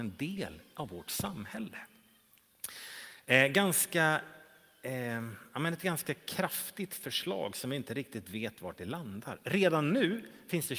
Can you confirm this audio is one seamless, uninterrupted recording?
yes; 0 cuts

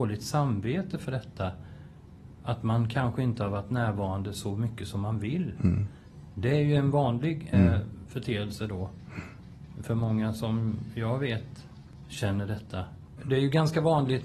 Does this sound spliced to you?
yes; 2 cuts; at 7.5 s, 13.2 s

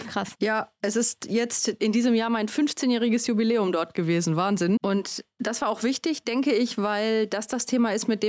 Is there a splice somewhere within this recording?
yes; 1 cut; at 4.8 s

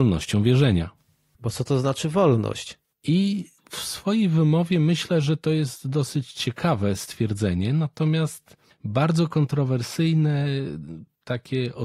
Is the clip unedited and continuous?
no; 2 cuts; at 1.3 s, 2.8 s

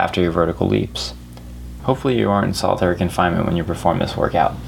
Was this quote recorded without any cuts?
no; 1 cut; at 1.8 s

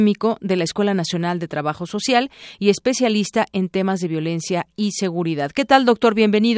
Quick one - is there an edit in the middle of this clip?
no; 0 cuts

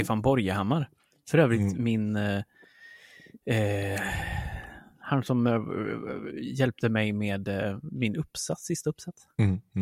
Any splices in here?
no; 0 cuts

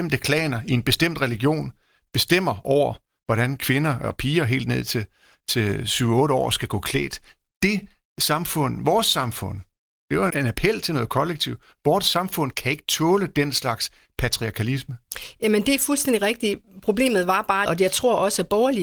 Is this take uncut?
no; 2 cuts; at 10.3 s, 17.7 s

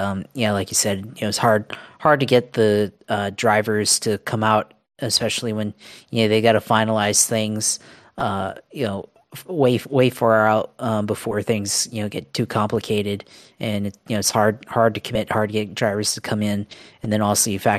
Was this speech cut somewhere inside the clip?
no; 0 cuts

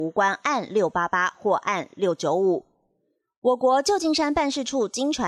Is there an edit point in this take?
no; 0 cuts

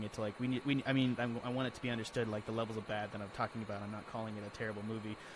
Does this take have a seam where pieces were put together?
yes; 1 cut; at 1.2 s

